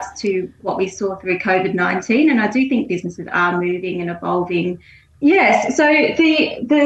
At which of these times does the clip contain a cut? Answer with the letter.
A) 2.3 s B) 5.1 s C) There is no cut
B